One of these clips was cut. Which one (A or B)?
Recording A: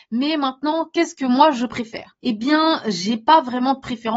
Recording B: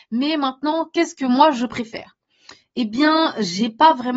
A